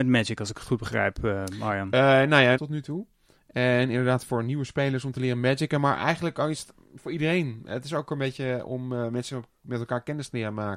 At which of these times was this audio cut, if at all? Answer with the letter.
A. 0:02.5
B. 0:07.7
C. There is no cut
A